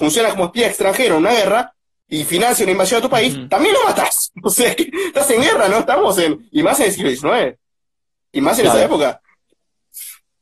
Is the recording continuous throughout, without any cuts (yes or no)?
yes